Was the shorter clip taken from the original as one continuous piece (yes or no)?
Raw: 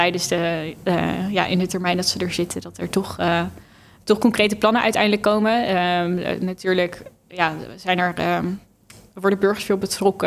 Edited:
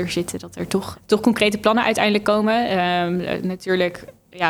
no